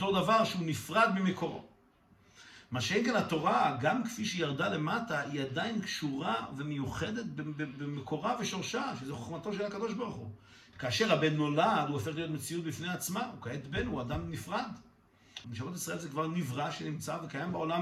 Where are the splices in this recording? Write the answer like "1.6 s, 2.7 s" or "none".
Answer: 10.7 s, 15.4 s

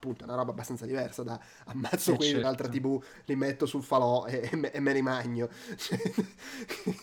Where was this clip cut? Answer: none

